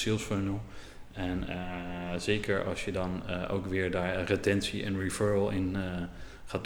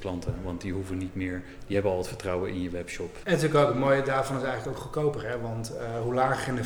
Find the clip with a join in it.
second; 1 cut; at 3.2 s

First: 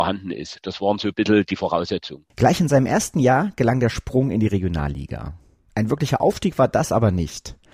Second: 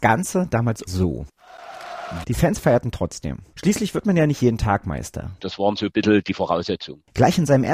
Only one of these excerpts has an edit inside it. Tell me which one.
second; 2 cuts; at 2.2 s, 5.4 s

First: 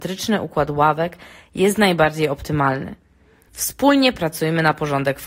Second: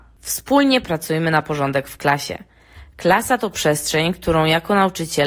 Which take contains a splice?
first; 1 cut; at 3.5 s

